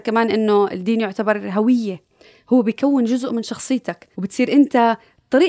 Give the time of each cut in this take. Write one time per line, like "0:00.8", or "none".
0:04.1